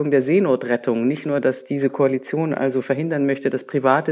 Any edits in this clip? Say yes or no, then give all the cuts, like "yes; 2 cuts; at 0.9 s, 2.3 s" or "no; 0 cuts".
no; 0 cuts